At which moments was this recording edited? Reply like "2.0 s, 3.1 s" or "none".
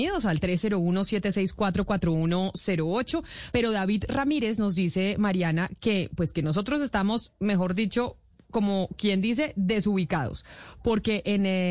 3.5 s